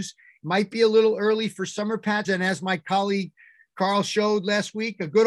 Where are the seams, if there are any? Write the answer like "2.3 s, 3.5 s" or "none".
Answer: 2.2 s